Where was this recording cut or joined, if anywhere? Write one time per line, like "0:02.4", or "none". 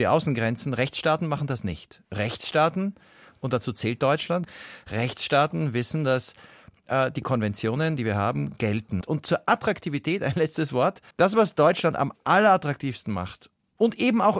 0:09.0
0:11.1